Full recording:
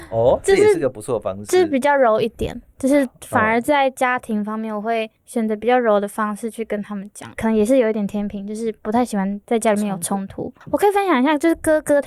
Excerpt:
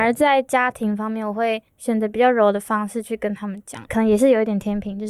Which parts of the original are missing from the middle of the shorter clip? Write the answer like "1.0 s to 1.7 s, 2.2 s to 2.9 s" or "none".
none

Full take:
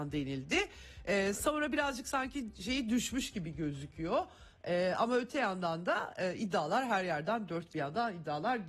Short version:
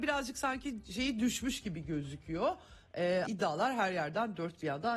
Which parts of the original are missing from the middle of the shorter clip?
5.0 s to 6.4 s

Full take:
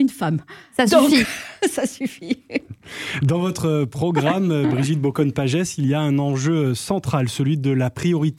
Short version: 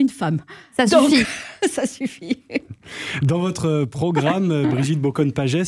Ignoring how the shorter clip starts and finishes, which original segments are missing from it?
none

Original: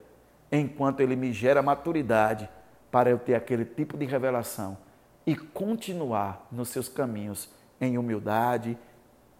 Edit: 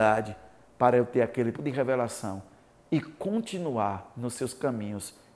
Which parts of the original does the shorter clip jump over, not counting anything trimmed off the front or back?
3.7 s to 3.9 s

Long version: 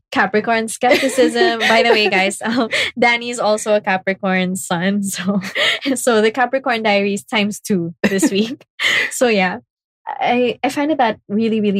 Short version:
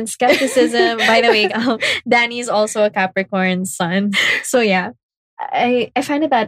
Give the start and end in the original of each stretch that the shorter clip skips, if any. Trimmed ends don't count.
2.1 s to 2.4 s, 5.0 s to 8.8 s

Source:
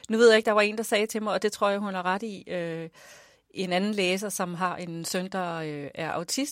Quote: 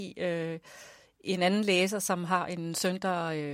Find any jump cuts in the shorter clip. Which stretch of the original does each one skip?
none

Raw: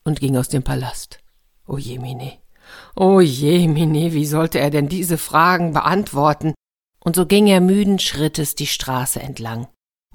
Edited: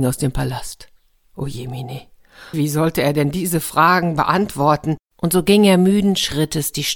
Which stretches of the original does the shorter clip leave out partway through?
2.8 s to 4.1 s, 6.6 s to 6.9 s

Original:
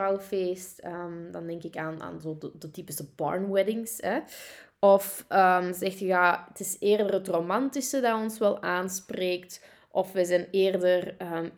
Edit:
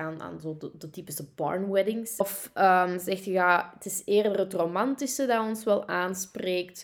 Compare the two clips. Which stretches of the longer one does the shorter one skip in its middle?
4.0 s to 4.9 s

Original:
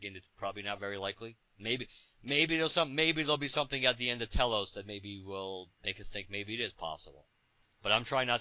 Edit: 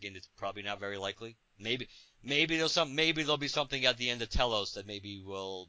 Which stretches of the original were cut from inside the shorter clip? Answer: none

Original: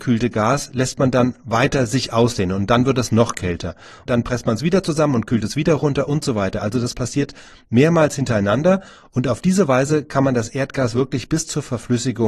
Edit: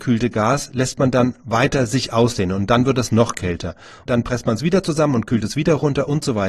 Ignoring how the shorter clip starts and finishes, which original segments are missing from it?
none

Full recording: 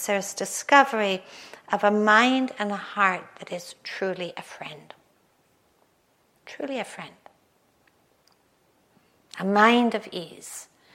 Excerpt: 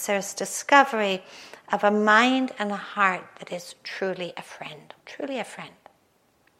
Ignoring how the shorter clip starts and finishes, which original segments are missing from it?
5.0 s to 6.4 s

